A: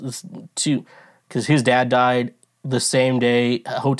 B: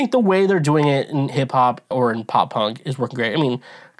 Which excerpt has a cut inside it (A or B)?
B